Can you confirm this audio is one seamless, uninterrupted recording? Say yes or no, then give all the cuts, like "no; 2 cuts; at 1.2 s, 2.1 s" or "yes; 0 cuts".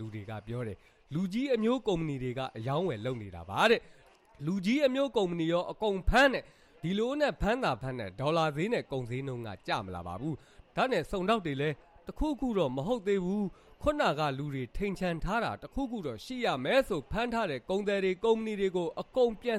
yes; 0 cuts